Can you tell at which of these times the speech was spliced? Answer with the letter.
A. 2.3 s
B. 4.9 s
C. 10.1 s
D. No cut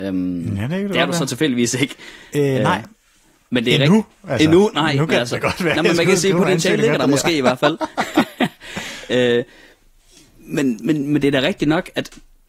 D